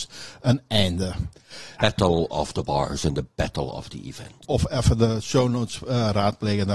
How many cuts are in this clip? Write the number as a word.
two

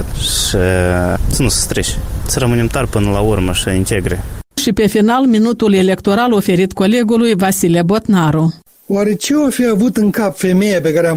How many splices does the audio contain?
zero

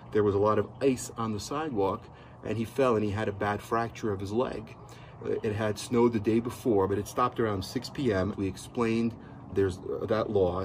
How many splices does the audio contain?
three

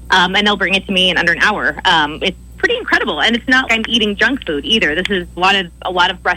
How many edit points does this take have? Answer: two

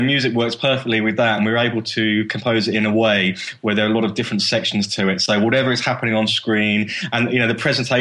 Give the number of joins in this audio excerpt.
zero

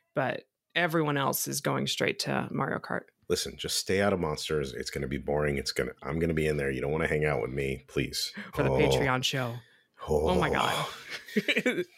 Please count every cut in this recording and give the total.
two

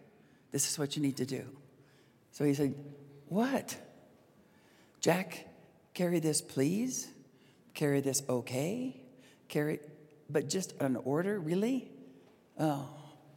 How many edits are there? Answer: zero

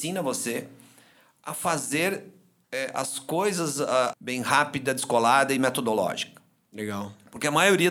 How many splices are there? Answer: one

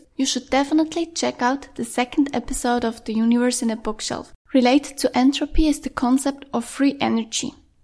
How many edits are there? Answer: one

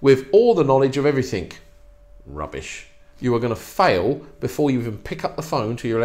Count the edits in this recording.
zero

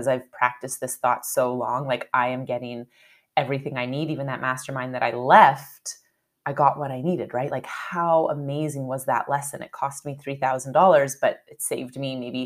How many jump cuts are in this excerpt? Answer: zero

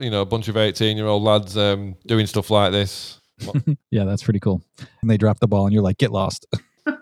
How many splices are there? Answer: one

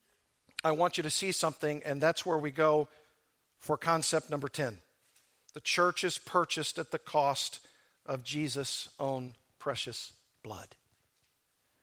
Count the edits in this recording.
zero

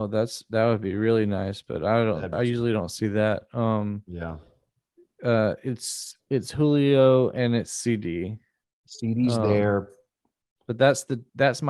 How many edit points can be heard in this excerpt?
one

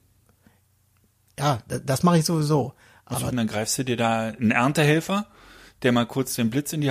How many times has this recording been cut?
one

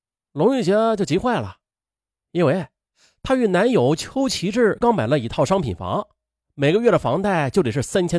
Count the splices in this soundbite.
one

